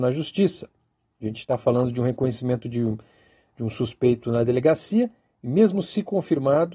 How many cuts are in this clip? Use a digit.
0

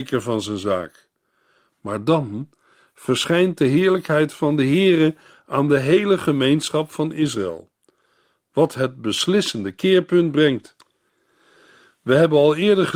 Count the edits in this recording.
0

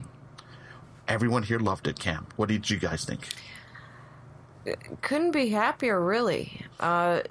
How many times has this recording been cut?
0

